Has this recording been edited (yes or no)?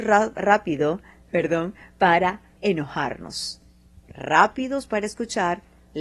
yes